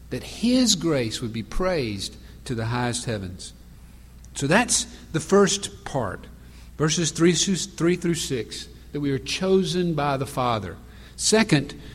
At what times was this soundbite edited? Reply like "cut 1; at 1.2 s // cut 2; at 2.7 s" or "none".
none